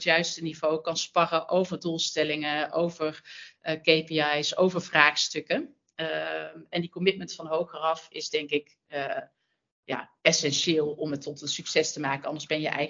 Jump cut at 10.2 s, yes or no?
yes